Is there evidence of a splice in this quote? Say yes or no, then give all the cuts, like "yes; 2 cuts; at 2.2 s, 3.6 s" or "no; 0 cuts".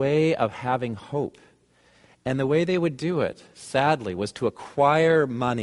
no; 0 cuts